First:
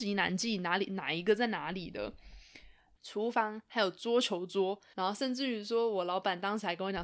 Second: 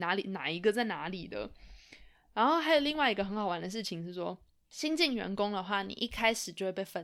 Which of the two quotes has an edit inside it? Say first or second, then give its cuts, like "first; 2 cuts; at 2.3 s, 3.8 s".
first; 2 cuts; at 3.0 s, 4.9 s